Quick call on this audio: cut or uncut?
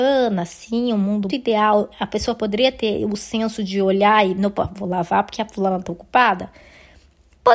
cut